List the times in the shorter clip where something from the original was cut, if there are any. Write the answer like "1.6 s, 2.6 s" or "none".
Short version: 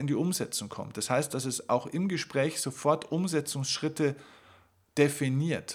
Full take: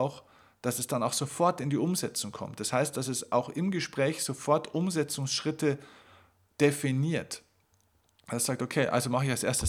none